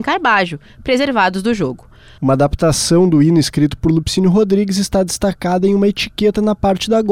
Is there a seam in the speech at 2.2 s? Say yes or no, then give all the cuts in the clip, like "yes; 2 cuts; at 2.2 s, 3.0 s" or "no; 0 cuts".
yes; 1 cut; at 2.2 s